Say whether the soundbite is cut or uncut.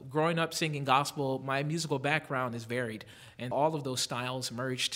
cut